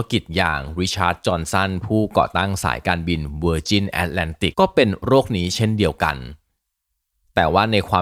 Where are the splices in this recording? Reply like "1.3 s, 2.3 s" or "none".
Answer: 4.5 s